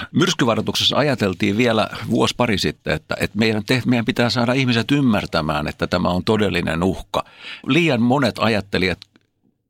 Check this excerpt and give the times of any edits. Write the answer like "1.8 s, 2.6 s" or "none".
none